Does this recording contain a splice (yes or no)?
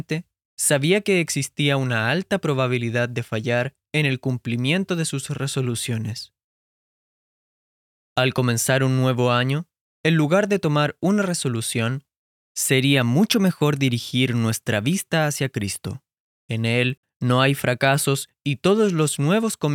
no